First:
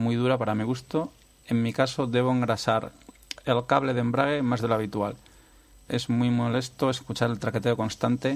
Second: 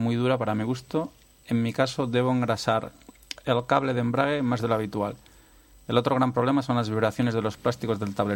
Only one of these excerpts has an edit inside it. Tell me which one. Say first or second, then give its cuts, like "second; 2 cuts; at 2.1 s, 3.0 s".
first; 1 cut; at 5.9 s